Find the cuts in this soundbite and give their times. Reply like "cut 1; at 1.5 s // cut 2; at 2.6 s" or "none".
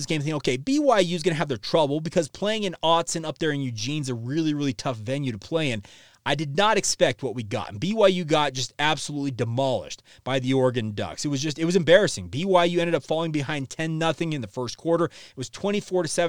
none

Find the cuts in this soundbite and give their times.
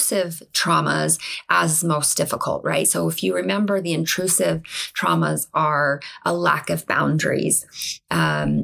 none

